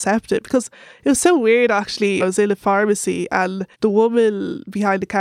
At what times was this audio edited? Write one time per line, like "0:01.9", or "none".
0:02.2
0:03.7